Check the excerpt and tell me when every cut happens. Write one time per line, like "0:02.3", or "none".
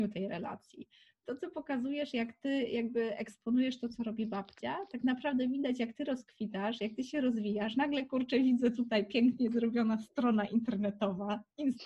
none